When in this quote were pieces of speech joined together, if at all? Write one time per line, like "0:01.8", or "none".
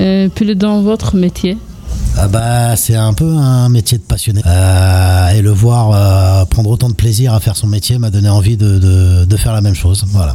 0:04.4